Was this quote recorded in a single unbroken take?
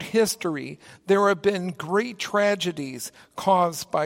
yes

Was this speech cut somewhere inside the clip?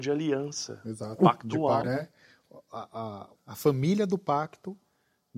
yes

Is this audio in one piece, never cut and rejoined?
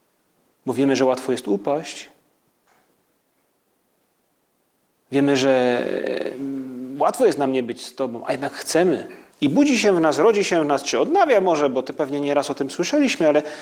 no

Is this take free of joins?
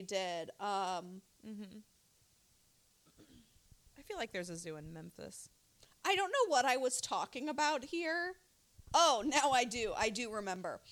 yes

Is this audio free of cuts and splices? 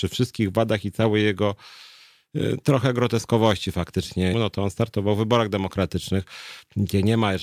no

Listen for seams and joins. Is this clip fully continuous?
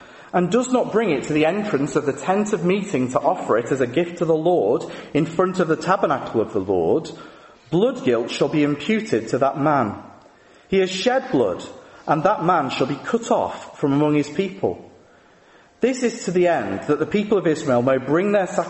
yes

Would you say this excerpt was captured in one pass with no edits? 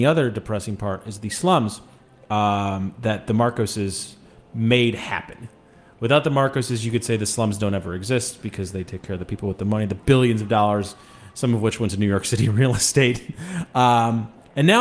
yes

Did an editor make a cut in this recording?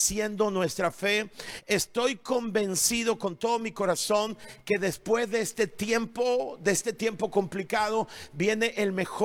no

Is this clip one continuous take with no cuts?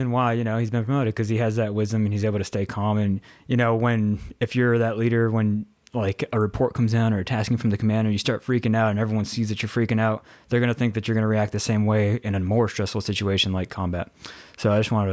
yes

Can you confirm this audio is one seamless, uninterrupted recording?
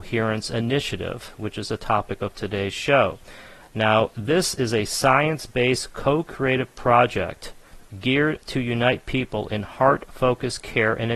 yes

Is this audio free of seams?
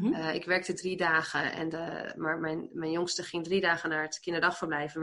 yes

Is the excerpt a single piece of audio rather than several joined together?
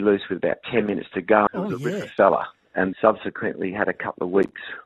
no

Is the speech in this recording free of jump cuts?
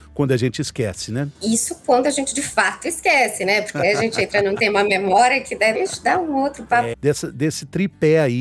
no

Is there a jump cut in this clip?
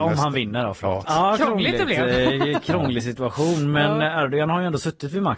yes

